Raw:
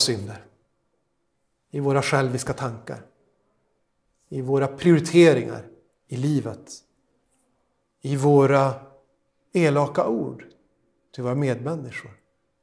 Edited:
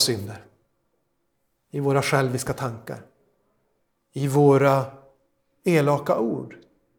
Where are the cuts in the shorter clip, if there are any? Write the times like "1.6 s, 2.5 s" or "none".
3.9 s